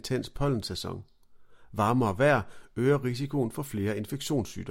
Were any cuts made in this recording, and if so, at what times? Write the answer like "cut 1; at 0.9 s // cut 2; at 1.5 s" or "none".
none